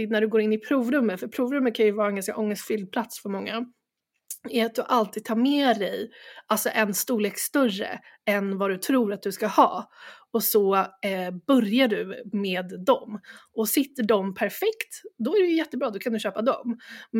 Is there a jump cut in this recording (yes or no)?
no